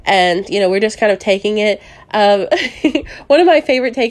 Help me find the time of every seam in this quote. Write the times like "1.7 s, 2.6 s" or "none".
none